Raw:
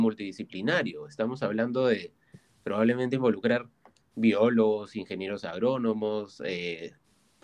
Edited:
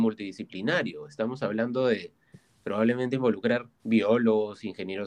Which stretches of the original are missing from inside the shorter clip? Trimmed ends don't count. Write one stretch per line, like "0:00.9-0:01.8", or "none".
0:03.7-0:04.1